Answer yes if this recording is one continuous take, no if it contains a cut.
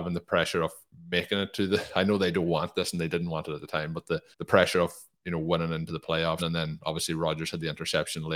no